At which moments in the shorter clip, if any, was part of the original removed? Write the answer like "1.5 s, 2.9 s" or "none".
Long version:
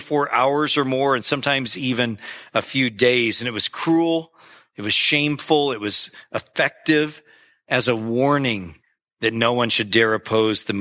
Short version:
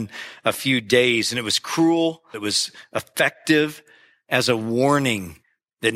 2.3 s

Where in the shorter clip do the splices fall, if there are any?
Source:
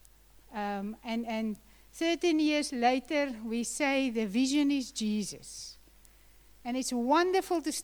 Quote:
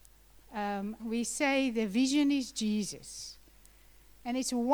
1.0 s

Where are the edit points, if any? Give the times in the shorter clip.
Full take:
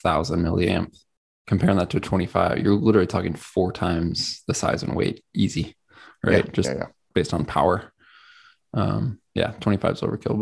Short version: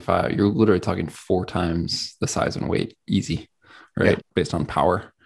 4.2 s

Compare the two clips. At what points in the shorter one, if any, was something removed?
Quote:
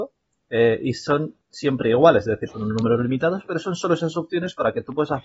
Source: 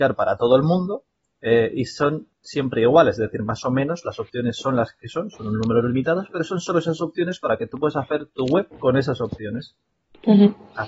2.5 s

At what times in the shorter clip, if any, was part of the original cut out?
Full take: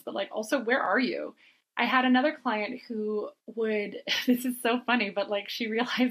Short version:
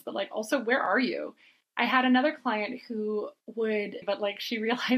4.0 s

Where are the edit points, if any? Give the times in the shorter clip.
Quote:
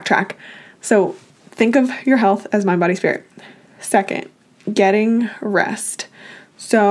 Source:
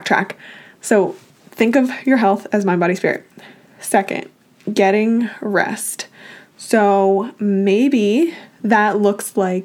none

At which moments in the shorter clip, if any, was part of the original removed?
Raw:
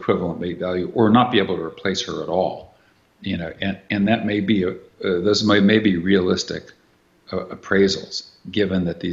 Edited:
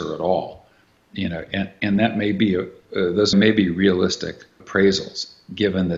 3.3 s, 4.6 s

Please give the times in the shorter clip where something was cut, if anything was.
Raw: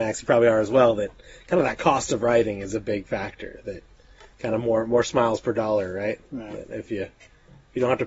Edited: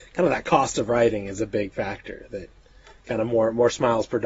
none

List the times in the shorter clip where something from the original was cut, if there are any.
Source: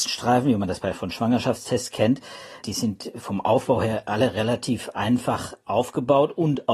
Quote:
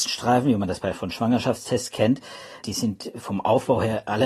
none

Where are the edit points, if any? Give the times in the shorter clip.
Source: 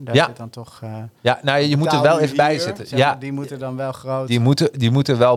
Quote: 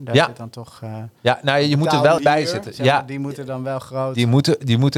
2.2 s

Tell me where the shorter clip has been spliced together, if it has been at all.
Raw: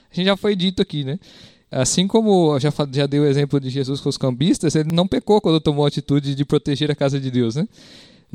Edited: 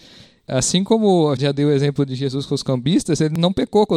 1.4 s

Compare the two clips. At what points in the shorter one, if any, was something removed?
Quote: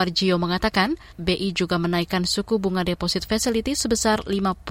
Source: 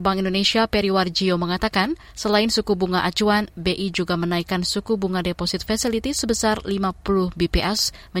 1.1 s

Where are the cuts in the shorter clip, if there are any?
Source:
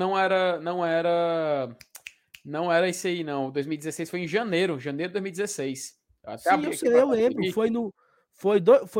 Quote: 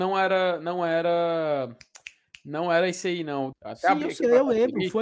3.5 s

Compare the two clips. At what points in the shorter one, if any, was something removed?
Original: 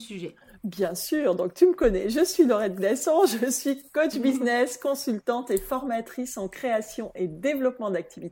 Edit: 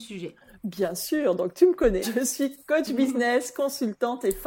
2.0 s

